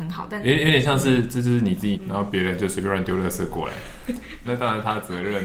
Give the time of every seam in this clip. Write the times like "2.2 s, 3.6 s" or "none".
1.9 s, 4.4 s

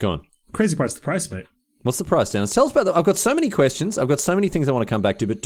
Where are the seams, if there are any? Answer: none

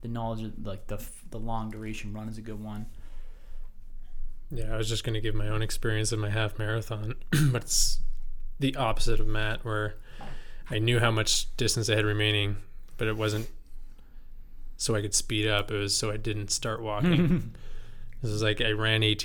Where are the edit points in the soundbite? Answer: 4.5 s

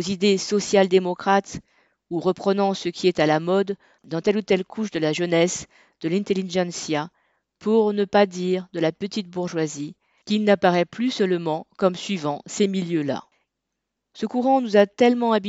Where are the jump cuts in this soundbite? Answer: 13.9 s

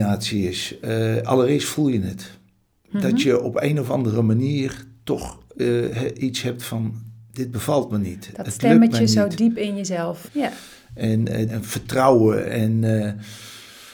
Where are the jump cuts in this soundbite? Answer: 10.3 s, 11.5 s

